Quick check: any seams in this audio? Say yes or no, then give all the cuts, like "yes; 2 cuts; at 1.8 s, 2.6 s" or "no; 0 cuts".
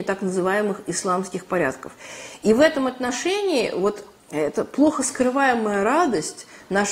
no; 0 cuts